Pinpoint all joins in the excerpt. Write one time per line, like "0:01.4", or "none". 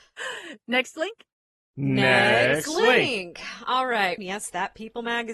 0:04.2